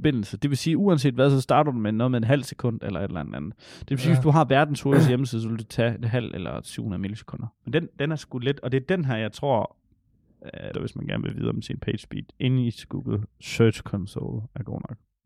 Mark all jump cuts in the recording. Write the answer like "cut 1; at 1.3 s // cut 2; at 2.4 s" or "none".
cut 1; at 7.6 s // cut 2; at 10.7 s